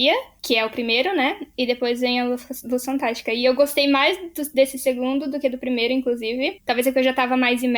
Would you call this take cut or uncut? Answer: uncut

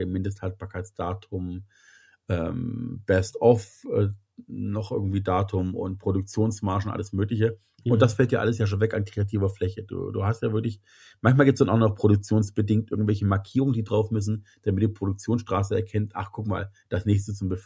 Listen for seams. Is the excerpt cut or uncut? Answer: uncut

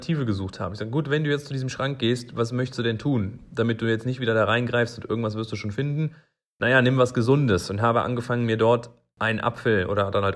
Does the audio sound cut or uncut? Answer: uncut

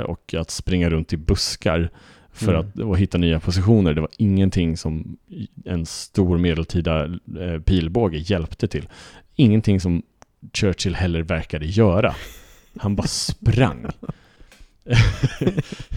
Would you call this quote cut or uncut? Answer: uncut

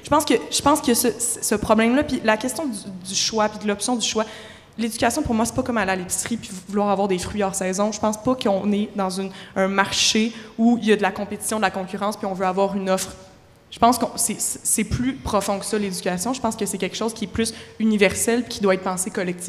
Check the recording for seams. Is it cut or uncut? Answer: uncut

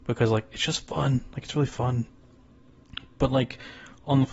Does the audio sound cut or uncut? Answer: uncut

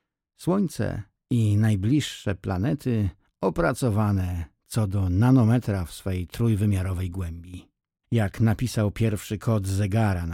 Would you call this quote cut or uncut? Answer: cut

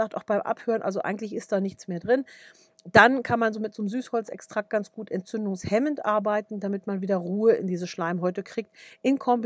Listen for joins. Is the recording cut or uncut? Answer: uncut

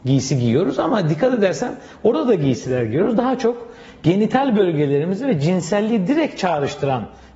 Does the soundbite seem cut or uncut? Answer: uncut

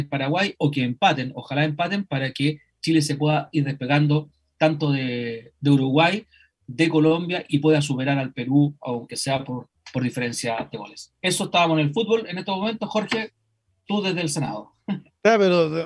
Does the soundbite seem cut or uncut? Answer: uncut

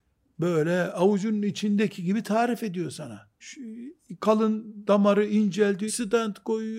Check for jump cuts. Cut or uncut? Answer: cut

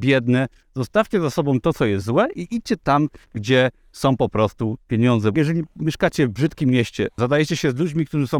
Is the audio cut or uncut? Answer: cut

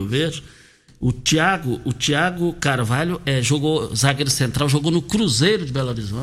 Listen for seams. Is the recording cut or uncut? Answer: cut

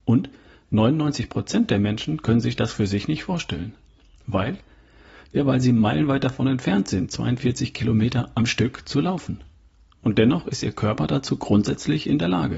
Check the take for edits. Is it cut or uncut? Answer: uncut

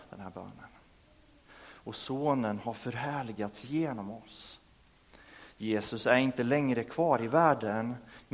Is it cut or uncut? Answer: cut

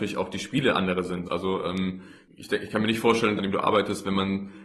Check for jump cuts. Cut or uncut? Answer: cut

